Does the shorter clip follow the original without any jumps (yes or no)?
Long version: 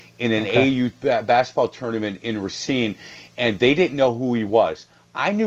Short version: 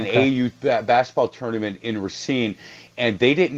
yes